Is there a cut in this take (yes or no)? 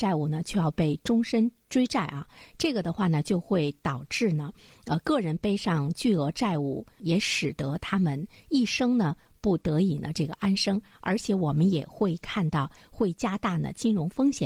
no